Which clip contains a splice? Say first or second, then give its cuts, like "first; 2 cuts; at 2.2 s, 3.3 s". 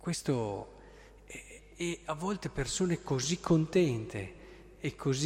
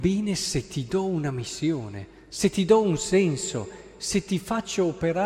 first; 1 cut; at 1.6 s